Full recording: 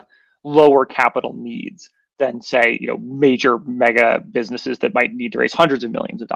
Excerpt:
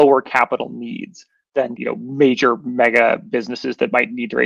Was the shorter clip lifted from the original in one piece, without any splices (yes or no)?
no